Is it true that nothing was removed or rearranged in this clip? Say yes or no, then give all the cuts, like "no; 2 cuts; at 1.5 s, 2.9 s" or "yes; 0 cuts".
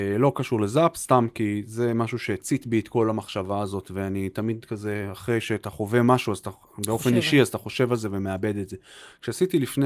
yes; 0 cuts